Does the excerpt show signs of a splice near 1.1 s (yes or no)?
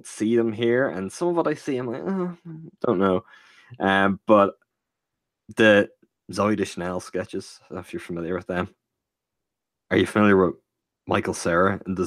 no